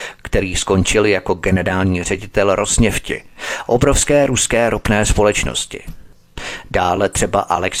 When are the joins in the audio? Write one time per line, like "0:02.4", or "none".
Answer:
none

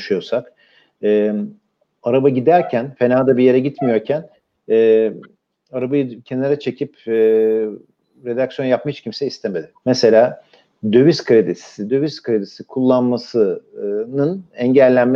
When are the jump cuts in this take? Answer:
0:09.8
0:11.9

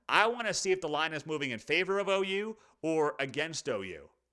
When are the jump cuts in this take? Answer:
none

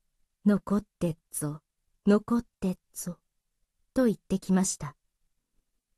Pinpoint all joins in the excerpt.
none

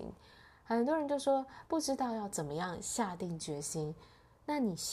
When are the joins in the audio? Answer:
none

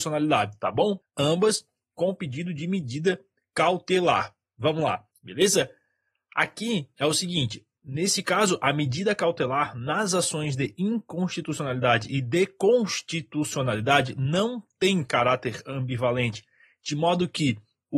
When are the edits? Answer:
0:01.0
0:05.1

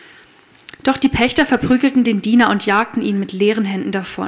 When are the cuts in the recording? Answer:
none

